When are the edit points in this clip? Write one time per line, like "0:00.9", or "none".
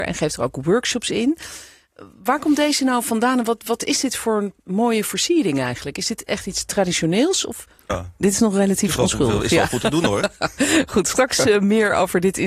0:07.9